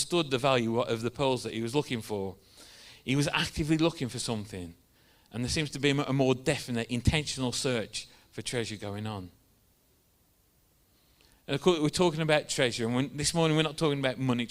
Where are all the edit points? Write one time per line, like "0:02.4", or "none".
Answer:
none